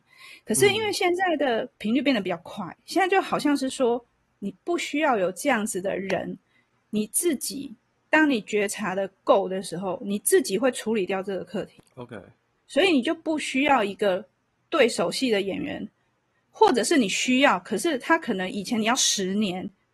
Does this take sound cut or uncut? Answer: uncut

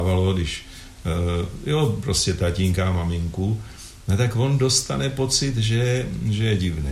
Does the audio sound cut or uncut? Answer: uncut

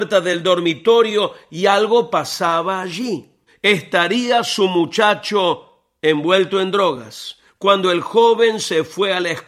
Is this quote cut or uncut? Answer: cut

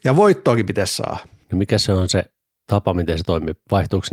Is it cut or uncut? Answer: cut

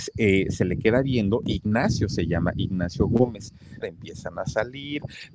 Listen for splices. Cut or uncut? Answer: cut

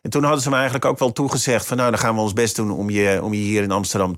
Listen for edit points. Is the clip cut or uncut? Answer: uncut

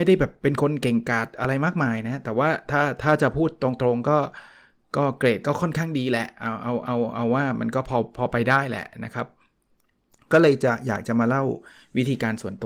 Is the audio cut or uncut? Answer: uncut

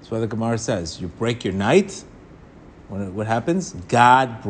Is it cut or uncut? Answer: uncut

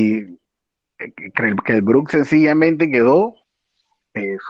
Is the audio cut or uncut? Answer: cut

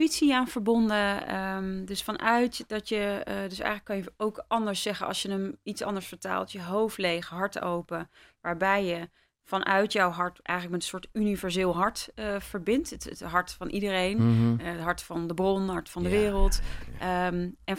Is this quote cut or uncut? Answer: uncut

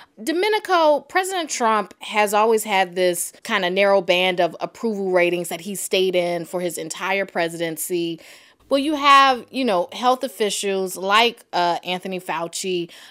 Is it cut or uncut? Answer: cut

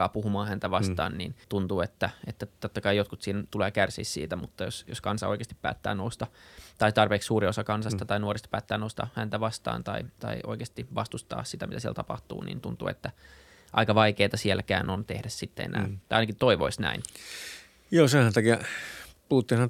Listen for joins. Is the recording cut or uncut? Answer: cut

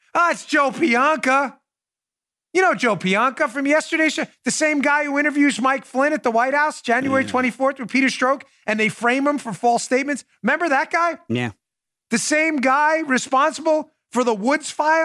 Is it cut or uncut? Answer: uncut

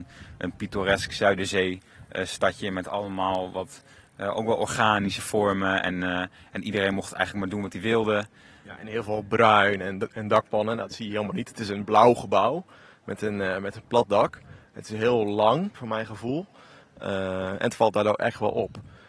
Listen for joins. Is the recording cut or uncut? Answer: cut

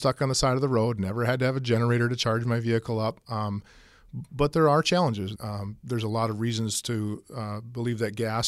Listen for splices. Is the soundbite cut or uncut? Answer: cut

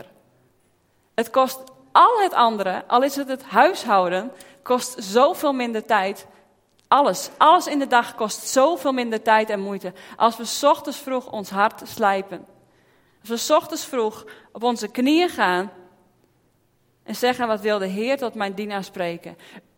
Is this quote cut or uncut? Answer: uncut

